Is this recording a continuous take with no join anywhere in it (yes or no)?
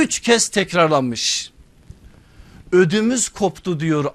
yes